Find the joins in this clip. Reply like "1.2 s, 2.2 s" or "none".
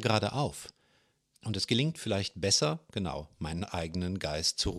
1.3 s